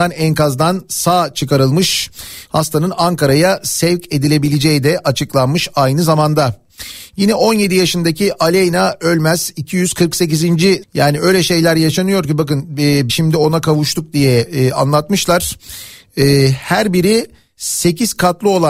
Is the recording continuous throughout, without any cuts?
no; 3 cuts; at 2.5 s, 10.8 s, 13.1 s

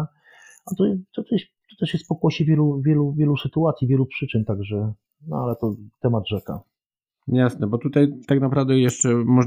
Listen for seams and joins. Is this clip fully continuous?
yes; 0 cuts

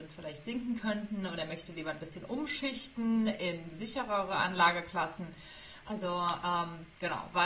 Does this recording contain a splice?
yes; 1 cut; at 5.8 s

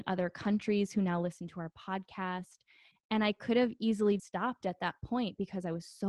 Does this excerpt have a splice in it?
yes; 2 cuts; at 2.9 s, 4.2 s

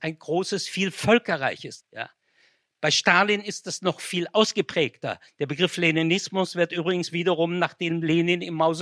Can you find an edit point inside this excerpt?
yes; 1 cut; at 1.8 s

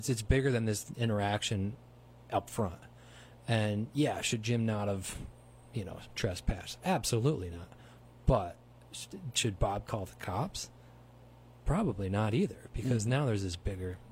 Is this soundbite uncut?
yes; 0 cuts

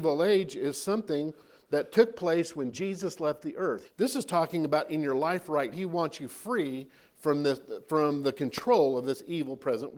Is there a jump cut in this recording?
yes; 2 cuts; at 3.8 s, 5.7 s

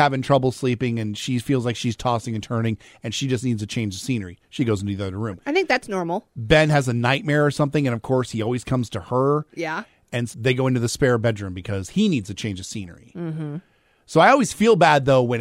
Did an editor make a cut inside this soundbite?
yes; 1 cut; at 10.3 s

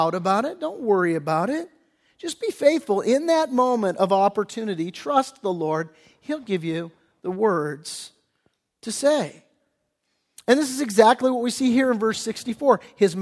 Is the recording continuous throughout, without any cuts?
yes; 0 cuts

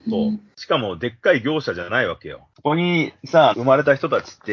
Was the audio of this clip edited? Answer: yes; 2 cuts; at 2.5 s, 3.5 s

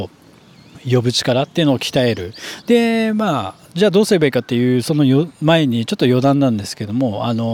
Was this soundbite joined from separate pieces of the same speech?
yes; 1 cut; at 2.6 s

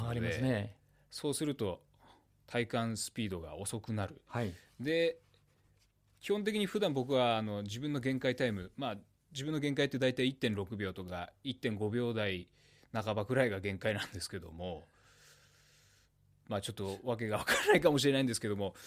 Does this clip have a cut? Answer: yes; 1 cut; at 4.3 s

